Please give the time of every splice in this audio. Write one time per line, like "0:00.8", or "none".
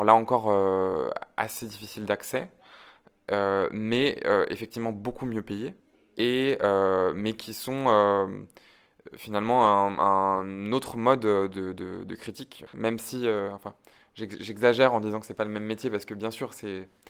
0:12.7